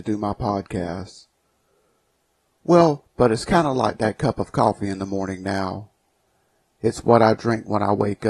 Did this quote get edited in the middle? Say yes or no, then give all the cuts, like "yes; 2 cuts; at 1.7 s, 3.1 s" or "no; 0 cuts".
yes; 1 cut; at 3.0 s